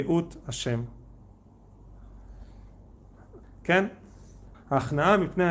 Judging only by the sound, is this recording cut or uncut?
cut